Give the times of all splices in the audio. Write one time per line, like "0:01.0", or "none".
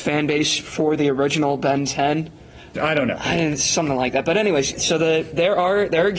0:02.8
0:04.7

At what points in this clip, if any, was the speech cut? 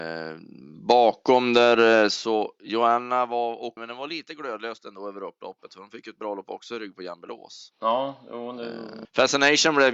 0:03.8
0:09.0

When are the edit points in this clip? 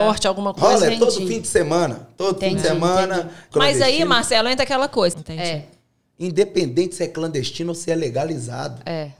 0:03.5
0:05.1

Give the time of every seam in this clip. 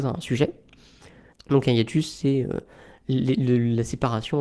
0:01.3

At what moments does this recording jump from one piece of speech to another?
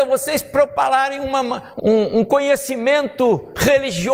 0:01.8

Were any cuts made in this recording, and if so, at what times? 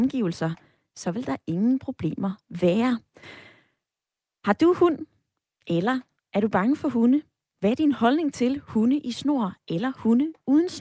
none

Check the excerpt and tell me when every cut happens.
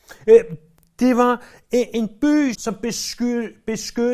0:02.5

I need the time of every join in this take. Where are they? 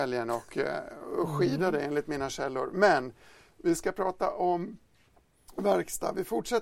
none

